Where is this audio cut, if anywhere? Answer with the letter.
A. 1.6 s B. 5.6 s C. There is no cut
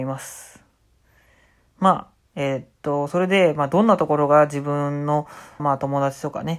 B